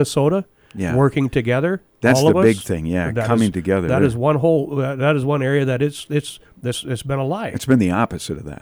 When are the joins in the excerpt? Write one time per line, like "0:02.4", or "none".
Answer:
none